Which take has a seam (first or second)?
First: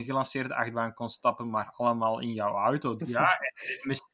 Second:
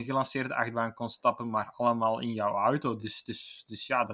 first